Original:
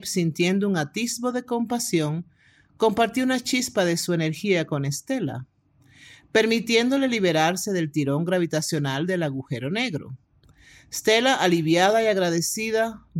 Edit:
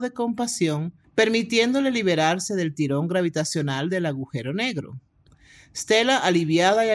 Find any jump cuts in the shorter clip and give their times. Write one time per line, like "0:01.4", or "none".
0:01.0